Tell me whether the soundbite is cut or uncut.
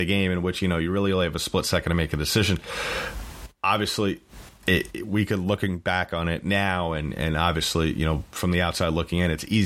uncut